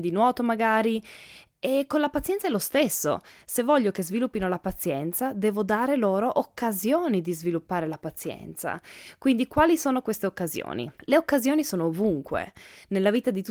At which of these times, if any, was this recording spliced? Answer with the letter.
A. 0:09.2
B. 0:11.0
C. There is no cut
B